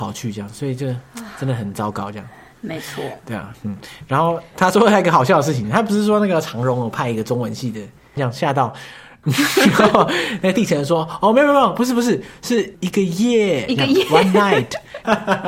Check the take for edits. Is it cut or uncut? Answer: cut